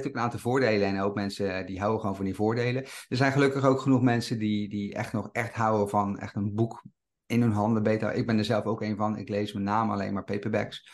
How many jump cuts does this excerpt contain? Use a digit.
0